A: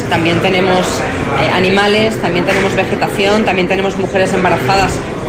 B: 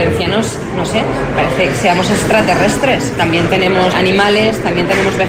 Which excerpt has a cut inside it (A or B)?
B